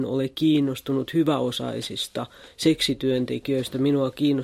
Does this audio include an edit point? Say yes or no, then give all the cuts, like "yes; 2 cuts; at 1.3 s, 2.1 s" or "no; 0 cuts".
no; 0 cuts